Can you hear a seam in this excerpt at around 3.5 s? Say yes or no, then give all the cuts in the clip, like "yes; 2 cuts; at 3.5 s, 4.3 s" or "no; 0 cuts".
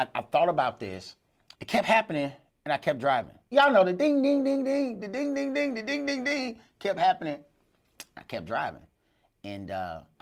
yes; 2 cuts; at 1.5 s, 3.5 s